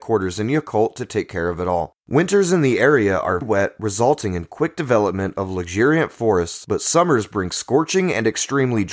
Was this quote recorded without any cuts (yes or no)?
no